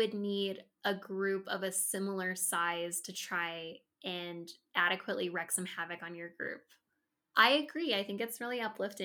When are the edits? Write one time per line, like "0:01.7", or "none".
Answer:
none